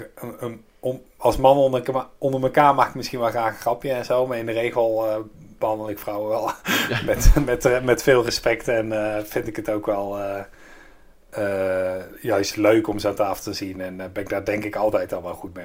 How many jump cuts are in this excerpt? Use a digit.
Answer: 0